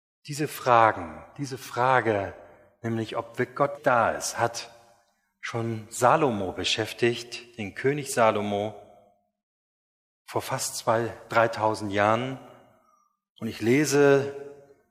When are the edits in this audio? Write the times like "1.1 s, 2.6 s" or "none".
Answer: 3.8 s